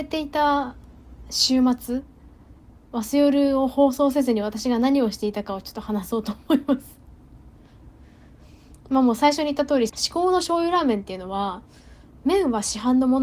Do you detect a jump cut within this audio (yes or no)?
yes